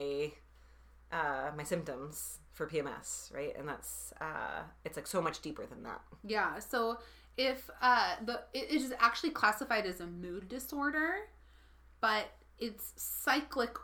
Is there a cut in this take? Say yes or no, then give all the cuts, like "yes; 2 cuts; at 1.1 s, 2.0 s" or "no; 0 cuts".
no; 0 cuts